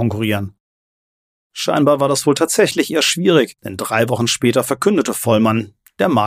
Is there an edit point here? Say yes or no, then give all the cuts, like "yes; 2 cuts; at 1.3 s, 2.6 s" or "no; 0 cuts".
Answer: yes; 1 cut; at 3.6 s